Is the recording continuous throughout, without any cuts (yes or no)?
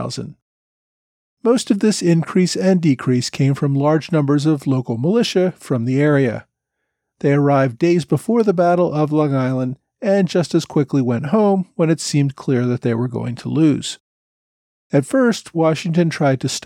yes